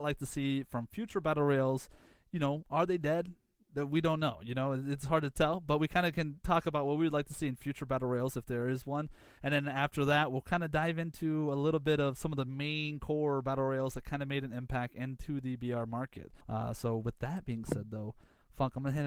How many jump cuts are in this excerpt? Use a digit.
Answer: 1